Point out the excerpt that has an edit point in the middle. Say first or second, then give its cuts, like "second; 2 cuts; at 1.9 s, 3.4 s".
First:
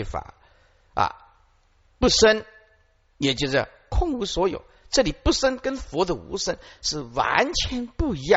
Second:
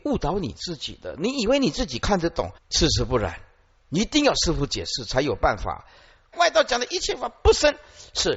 second; 2 cuts; at 2.6 s, 6.3 s